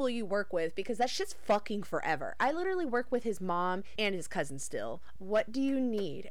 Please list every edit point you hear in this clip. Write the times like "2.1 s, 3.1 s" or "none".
4.0 s, 5.2 s